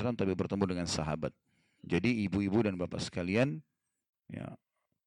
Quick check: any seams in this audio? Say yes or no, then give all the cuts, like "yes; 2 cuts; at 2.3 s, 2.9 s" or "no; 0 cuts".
yes; 1 cut; at 1.8 s